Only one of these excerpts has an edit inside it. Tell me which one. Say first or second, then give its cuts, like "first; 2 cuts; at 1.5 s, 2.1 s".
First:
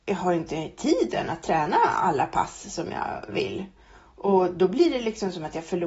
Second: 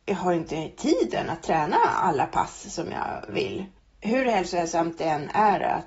second; 1 cut; at 3.8 s